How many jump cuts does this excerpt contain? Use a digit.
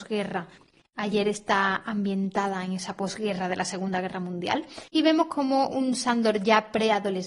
1